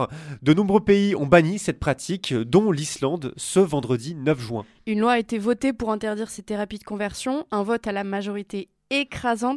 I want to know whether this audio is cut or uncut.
uncut